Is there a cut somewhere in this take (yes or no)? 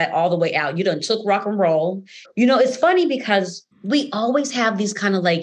yes